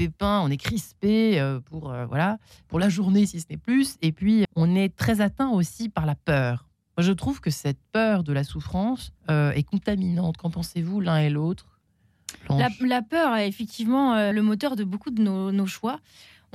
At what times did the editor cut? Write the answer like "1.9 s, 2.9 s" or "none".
4.4 s, 9.2 s, 14.3 s